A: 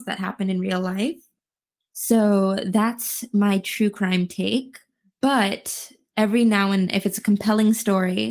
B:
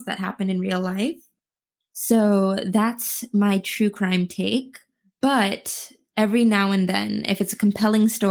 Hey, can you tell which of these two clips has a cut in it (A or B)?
A